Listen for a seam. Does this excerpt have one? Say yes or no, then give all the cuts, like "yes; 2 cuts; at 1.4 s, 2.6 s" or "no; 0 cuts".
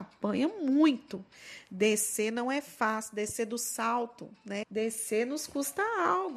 yes; 1 cut; at 4.6 s